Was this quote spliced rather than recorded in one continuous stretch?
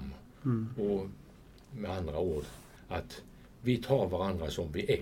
yes; 1 cut; at 2.8 s

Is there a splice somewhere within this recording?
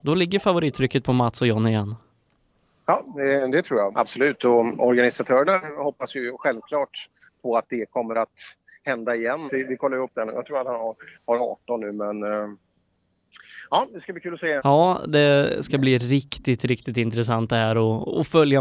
yes; 3 cuts; at 3.9 s, 9.5 s, 14.6 s

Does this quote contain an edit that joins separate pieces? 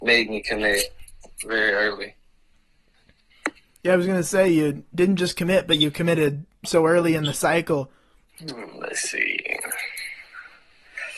yes; 1 cut; at 8.3 s

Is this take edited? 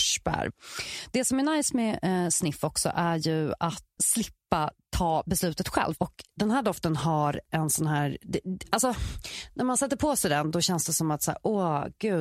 yes; 2 cuts; at 4.0 s, 6.0 s

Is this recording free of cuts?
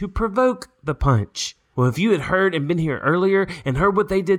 no; 1 cut; at 1.7 s

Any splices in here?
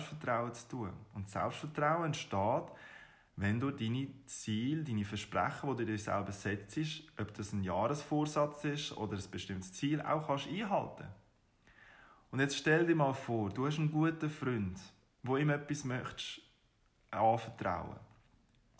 no; 0 cuts

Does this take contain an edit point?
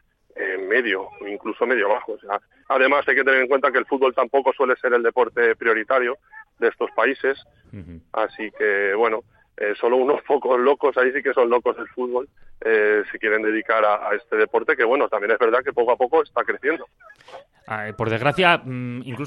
yes; 1 cut; at 7.6 s

